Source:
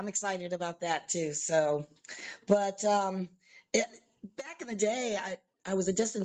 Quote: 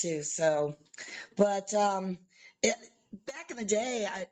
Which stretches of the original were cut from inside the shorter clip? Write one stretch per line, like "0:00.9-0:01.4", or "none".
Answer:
none